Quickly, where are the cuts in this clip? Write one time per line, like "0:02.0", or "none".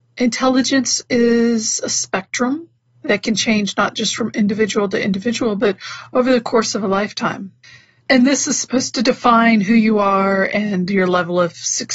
0:08.0